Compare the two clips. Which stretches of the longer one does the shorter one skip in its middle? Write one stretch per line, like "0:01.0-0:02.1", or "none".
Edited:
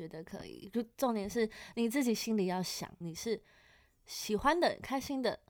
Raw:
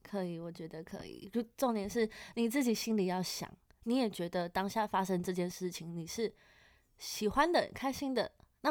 0:03.6-0:05.9